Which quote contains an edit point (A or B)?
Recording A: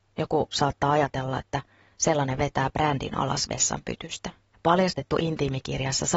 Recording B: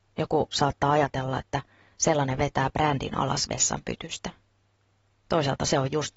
A